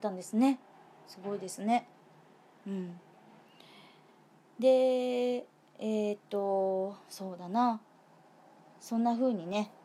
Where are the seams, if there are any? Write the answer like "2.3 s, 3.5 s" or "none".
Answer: none